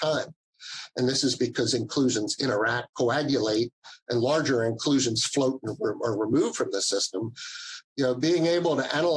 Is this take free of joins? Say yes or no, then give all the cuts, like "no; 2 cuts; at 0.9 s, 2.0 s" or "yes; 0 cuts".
no; 2 cuts; at 2.9 s, 7.8 s